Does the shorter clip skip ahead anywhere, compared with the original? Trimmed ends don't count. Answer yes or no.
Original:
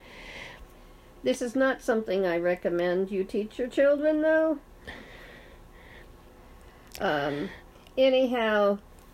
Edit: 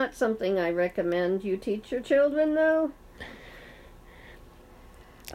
no